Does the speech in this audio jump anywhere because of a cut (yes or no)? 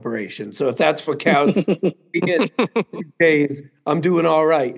no